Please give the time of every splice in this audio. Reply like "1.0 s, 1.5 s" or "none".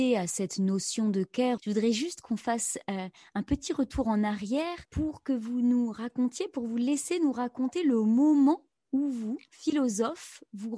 1.6 s, 4.9 s

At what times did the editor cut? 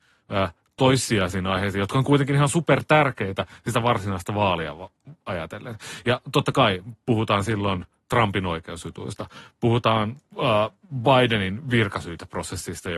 none

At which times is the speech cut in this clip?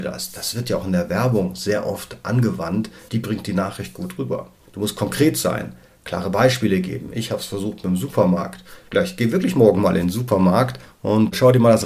3.1 s

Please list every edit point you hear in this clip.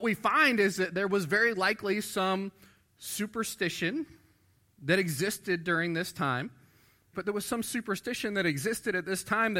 7.1 s

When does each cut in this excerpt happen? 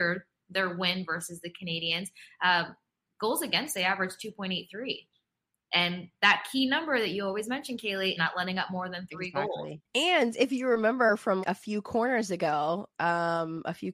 8.2 s, 9.8 s, 11.4 s

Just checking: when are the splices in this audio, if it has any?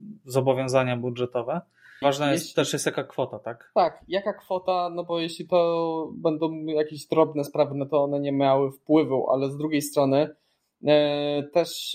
2.0 s

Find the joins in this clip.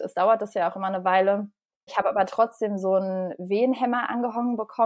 1.9 s

